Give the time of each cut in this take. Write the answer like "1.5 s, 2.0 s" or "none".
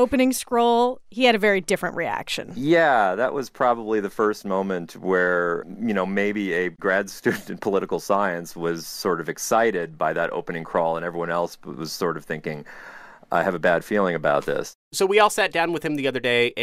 none